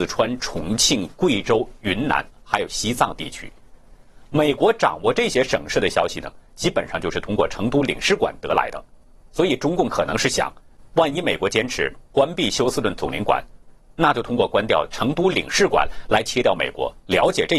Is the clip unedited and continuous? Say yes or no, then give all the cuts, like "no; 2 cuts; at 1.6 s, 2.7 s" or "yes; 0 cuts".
yes; 0 cuts